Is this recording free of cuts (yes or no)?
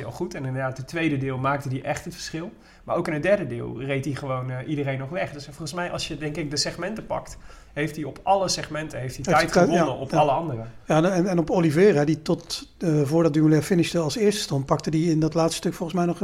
yes